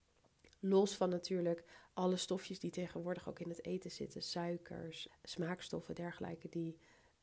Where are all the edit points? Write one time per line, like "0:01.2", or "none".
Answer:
0:05.1